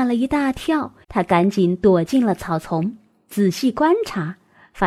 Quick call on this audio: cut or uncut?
cut